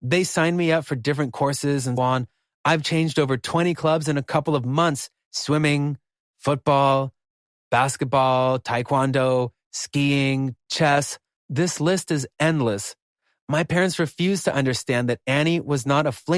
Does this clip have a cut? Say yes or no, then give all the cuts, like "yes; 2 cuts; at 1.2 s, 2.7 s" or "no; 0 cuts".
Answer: yes; 1 cut; at 2.0 s